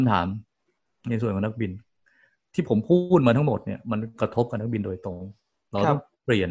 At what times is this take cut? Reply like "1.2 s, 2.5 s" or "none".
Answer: none